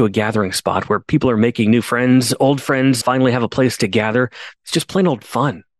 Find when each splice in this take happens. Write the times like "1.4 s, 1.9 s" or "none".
3.0 s, 4.6 s